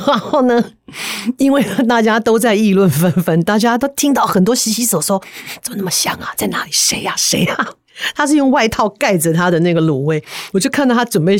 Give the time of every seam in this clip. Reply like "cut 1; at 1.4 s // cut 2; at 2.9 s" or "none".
cut 1; at 6.3 s // cut 2; at 10.5 s